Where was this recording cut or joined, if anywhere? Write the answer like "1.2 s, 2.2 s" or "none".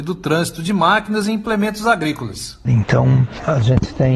2.7 s